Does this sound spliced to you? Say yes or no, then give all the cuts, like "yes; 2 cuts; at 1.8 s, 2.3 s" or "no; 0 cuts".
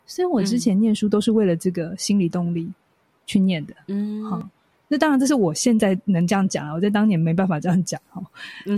no; 0 cuts